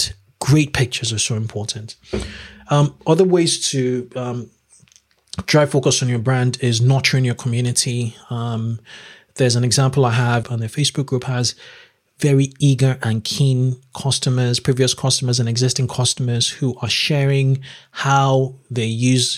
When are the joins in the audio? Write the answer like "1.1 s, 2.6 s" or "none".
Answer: 10.4 s

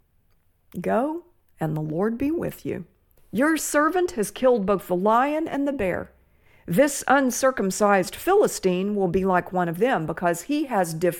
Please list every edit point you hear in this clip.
3.2 s

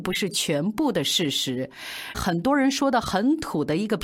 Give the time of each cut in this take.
2.1 s

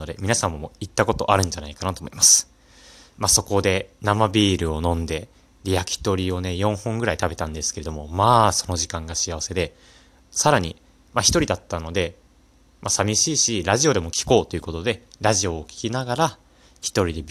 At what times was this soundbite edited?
none

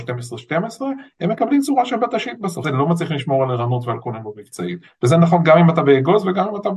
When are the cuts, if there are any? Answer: 2.6 s

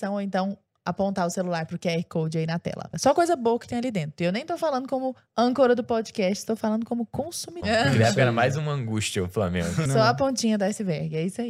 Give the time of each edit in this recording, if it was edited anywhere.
7.6 s, 9.9 s

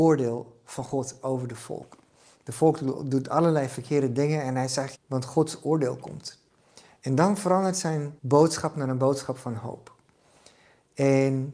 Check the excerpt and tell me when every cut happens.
4.9 s, 8.2 s

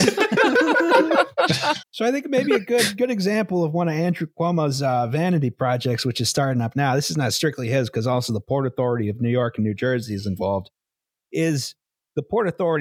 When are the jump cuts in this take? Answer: 1.8 s

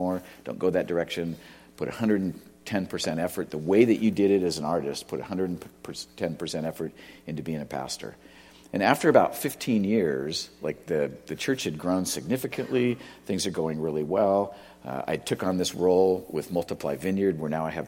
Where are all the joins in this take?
none

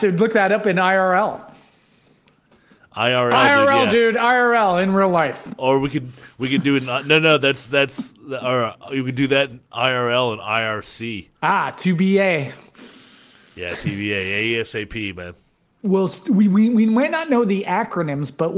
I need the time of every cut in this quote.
11.4 s

